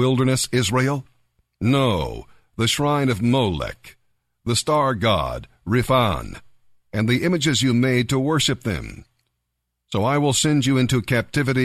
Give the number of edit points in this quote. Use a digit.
1